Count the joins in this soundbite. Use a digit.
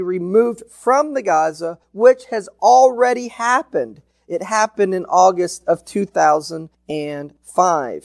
0